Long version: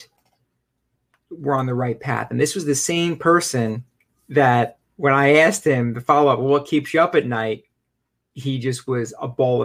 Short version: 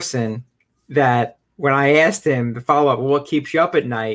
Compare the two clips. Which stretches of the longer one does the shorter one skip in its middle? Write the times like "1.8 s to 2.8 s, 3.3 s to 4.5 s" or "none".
none